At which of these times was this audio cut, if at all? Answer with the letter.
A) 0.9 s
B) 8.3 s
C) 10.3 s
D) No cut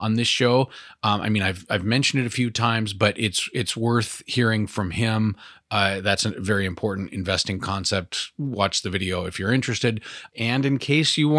C